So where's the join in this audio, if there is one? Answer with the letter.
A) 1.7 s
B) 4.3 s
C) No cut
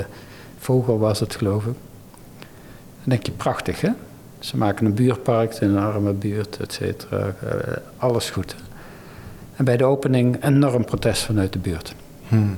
C